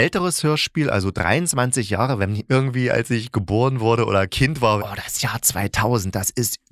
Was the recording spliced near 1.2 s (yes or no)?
no